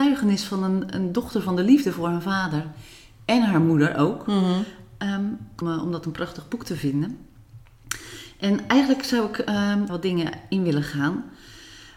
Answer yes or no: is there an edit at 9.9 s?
yes